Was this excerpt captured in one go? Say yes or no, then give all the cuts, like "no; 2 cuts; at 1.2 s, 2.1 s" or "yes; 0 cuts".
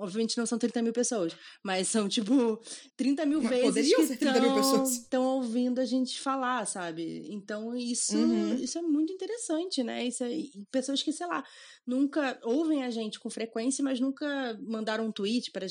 no; 1 cut; at 2.9 s